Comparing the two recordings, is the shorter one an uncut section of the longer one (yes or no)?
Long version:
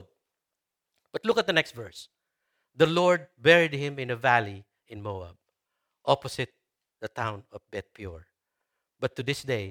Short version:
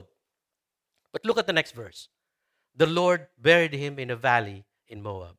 yes